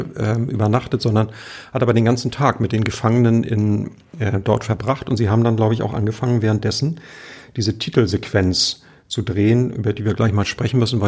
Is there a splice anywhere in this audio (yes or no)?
no